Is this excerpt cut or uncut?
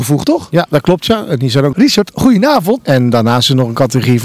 cut